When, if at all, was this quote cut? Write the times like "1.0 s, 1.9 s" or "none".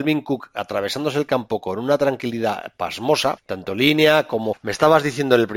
3.4 s, 4.5 s

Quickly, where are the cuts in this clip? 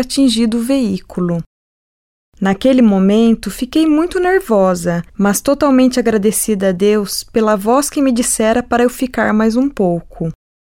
5.1 s

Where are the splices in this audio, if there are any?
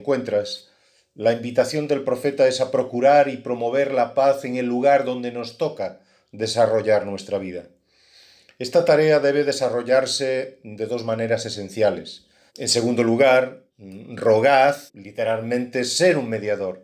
12.5 s, 13.7 s, 14.9 s

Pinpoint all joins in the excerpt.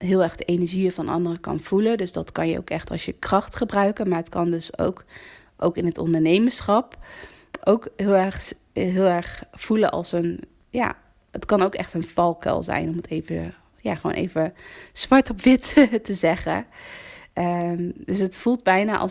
none

